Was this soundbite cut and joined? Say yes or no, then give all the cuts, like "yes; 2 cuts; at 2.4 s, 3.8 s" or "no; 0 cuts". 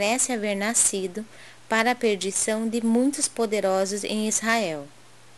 no; 0 cuts